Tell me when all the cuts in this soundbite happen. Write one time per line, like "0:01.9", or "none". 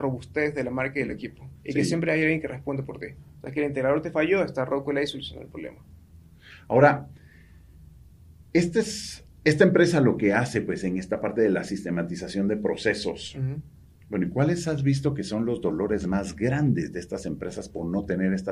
0:01.6

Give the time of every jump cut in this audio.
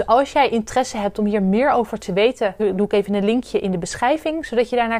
0:02.6

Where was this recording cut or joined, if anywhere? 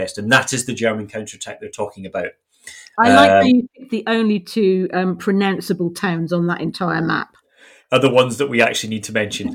none

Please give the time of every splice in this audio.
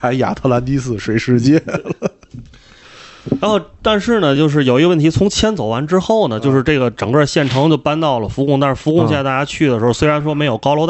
none

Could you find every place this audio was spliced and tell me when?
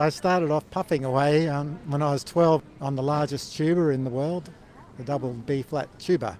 none

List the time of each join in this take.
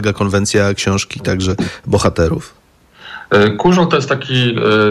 none

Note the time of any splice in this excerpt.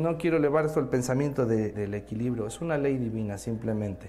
0:01.7

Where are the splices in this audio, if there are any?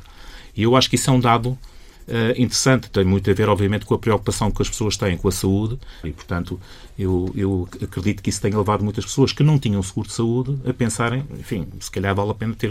0:06.0

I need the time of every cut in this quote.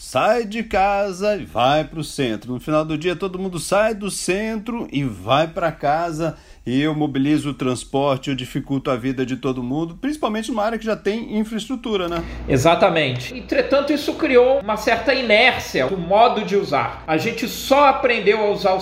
0:13.3
0:15.9

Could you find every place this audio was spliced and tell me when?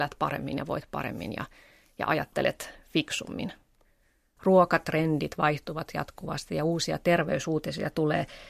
0:04.4

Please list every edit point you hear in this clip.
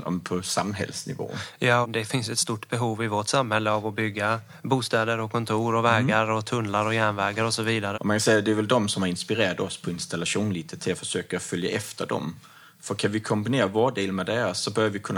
0:01.8
0:07.9

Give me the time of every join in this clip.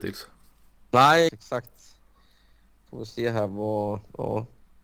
0:01.3

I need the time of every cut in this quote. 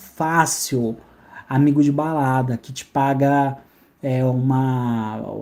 0:02.6

